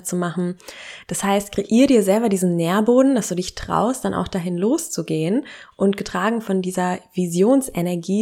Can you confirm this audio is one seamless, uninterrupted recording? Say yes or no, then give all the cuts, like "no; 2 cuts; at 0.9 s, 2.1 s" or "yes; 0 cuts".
yes; 0 cuts